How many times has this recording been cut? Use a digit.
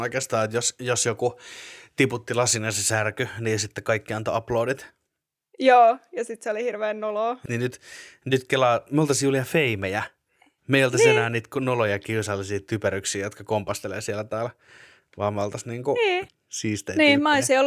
2